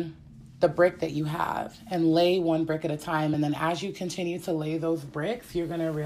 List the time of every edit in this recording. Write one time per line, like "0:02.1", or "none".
none